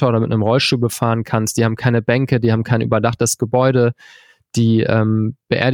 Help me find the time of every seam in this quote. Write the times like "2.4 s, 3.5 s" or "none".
none